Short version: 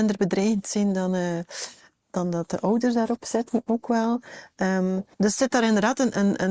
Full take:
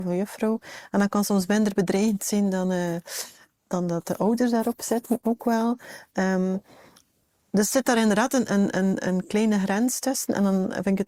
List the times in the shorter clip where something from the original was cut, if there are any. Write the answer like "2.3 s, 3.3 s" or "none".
5.1 s